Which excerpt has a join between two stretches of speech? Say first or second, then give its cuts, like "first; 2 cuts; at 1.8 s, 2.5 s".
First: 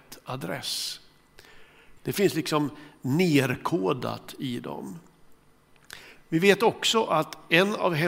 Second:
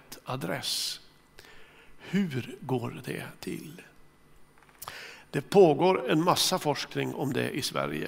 first; 1 cut; at 2.0 s